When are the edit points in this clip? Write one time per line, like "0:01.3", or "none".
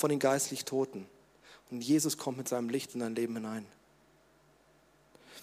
none